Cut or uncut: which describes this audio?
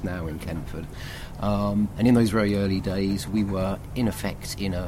uncut